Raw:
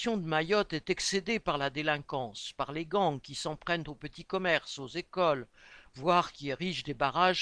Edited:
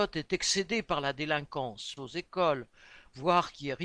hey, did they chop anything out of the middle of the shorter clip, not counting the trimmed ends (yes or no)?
yes